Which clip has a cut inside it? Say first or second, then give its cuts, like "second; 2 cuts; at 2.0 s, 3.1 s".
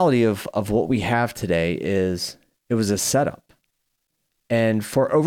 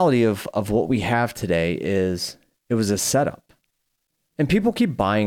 second; 1 cut; at 4.3 s